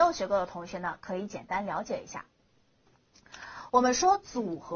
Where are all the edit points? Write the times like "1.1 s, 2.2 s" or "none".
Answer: none